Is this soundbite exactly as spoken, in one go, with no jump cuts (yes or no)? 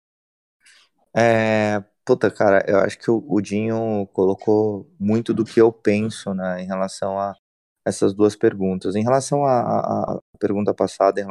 yes